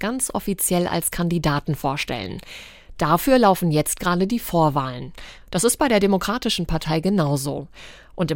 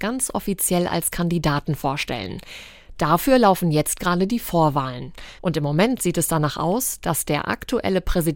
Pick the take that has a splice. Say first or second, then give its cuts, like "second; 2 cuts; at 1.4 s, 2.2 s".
second; 1 cut; at 5.4 s